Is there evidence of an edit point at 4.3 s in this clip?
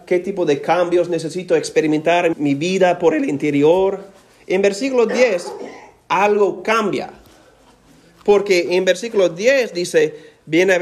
no; 1 cut; at 2.3 s

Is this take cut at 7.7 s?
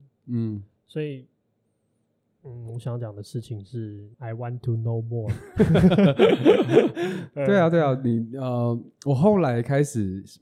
no; 1 cut; at 4.1 s

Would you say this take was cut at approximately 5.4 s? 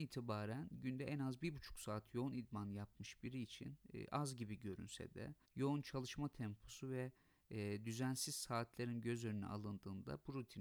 yes; 1 cut; at 5.4 s

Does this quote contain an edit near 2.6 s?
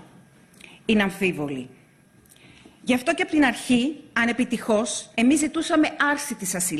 no; 1 cut; at 5.1 s

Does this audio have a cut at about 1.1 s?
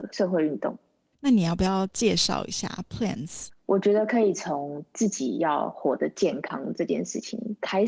no; 1 cut; at 3.5 s

